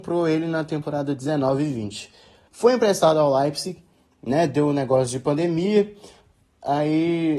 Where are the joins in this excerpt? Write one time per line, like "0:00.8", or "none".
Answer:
0:02.5